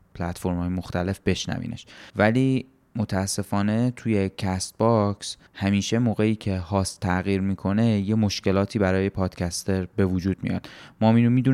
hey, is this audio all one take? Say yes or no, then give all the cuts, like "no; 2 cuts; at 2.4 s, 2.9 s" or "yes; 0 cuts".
no; 2 cuts; at 2.1 s, 5.5 s